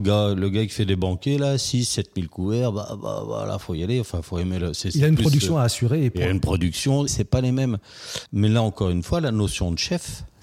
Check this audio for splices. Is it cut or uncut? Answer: cut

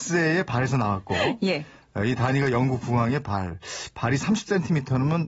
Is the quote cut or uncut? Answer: uncut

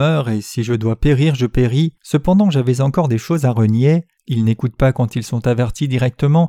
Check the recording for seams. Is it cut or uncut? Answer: cut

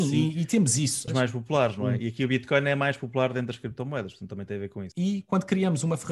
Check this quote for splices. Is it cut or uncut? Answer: cut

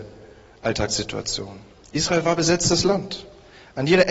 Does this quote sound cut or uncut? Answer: uncut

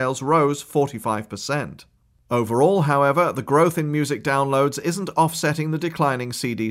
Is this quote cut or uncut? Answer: uncut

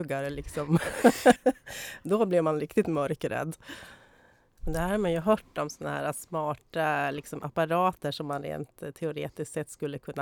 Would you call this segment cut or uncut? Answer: cut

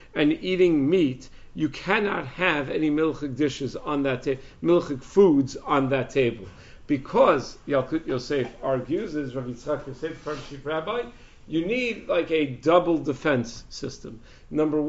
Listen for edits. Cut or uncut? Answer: uncut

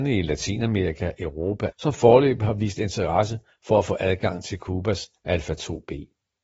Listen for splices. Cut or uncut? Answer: cut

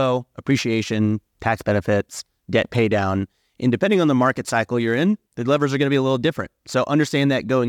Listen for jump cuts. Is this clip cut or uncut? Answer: cut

